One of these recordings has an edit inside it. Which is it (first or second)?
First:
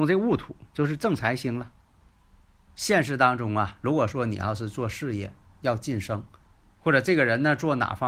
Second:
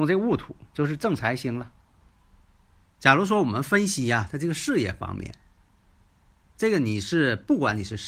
first